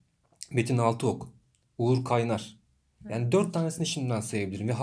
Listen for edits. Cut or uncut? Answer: cut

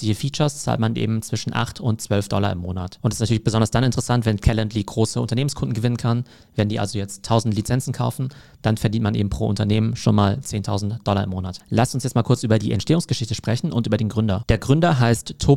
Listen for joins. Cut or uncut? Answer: cut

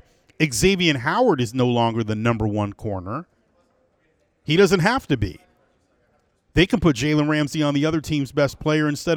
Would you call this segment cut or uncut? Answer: uncut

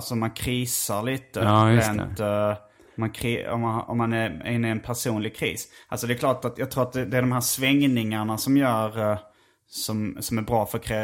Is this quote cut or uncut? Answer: uncut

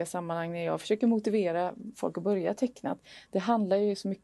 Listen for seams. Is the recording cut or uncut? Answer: uncut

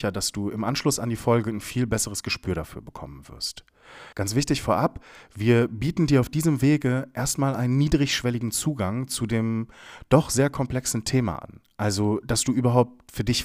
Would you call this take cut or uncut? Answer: cut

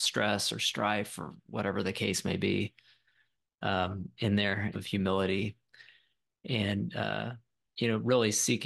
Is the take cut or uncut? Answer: cut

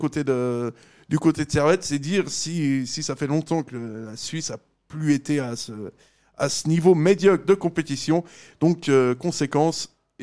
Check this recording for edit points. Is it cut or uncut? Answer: uncut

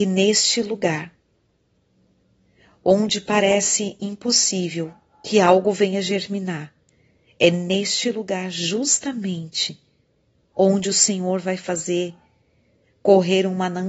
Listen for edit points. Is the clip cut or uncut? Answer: uncut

